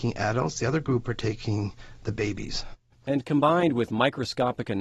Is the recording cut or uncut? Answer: cut